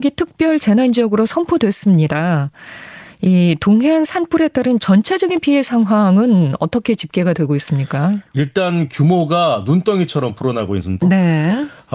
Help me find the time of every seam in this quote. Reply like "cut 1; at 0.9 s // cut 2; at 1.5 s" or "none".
cut 1; at 11.0 s

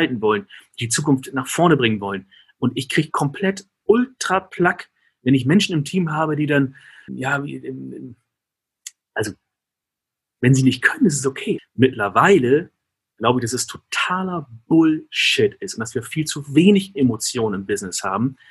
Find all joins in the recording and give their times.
cut 1; at 7.1 s // cut 2; at 11.6 s

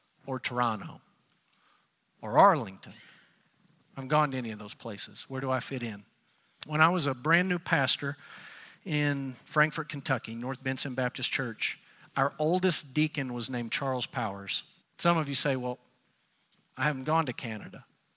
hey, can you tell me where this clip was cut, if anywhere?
cut 1; at 6.6 s // cut 2; at 14.8 s

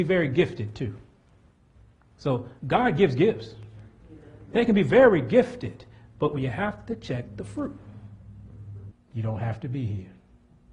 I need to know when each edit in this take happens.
cut 1; at 2.6 s // cut 2; at 8.9 s

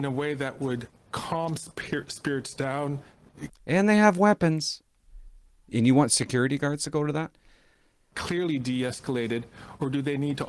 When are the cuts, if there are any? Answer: cut 1; at 3.5 s // cut 2; at 8.1 s

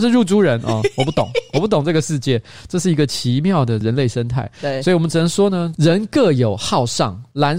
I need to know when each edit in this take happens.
none

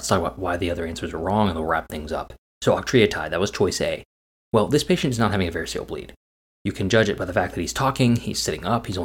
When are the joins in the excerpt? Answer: none

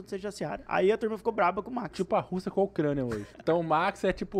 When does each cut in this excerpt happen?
cut 1; at 3.3 s

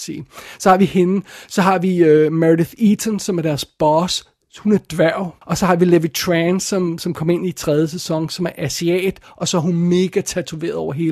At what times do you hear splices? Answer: cut 1; at 5.4 s

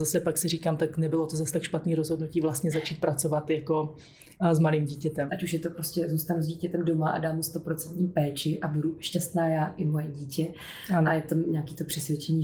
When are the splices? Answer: cut 1; at 5.3 s

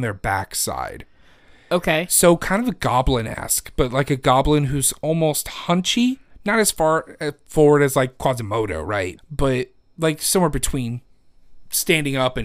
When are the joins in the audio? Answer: cut 1; at 9.2 s

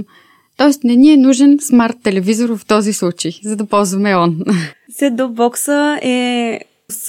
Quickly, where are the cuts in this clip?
cut 1; at 4.7 s

